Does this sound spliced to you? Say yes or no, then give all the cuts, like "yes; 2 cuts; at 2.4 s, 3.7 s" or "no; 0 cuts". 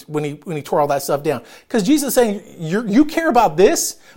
no; 0 cuts